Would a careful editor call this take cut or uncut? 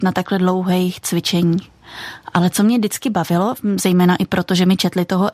uncut